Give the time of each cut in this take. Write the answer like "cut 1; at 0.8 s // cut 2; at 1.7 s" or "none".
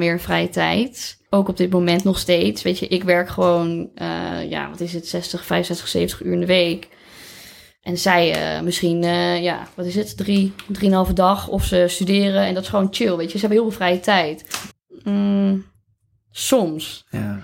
cut 1; at 1.3 s // cut 2; at 14.7 s